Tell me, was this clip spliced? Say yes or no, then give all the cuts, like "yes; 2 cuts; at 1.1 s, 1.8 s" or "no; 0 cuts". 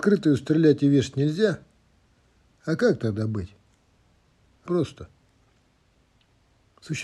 yes; 1 cut; at 4.7 s